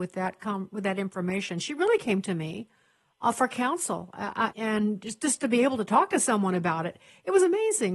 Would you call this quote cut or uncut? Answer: cut